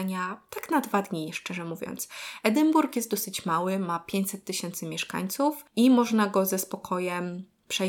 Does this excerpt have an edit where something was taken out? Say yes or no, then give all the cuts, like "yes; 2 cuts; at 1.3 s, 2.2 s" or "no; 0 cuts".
no; 0 cuts